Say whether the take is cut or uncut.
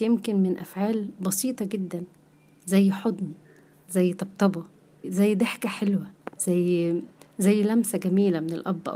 cut